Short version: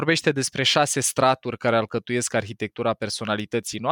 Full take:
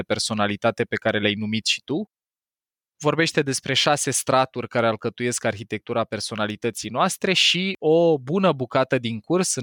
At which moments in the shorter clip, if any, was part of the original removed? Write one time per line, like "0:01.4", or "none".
none